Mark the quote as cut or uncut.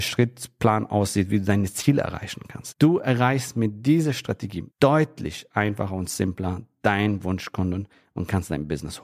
cut